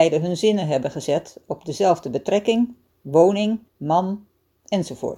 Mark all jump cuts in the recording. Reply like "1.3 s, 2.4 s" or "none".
3.7 s